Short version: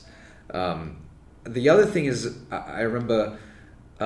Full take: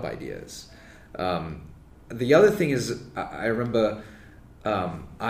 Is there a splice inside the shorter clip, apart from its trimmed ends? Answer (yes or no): no